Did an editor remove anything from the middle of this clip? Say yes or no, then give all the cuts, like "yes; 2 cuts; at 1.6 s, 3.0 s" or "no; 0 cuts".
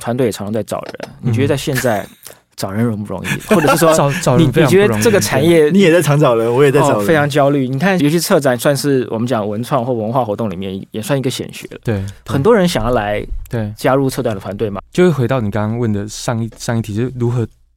yes; 2 cuts; at 8.0 s, 14.8 s